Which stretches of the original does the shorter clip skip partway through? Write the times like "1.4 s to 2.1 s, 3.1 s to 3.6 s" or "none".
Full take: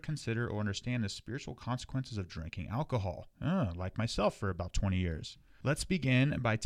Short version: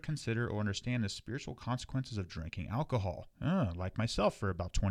none